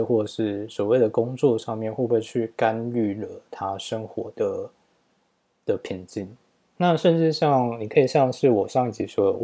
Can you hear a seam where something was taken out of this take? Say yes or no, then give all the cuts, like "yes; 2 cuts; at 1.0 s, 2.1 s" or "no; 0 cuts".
yes; 1 cut; at 6.8 s